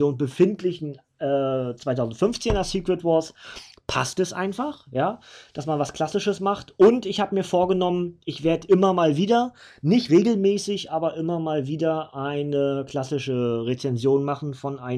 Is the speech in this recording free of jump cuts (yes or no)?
no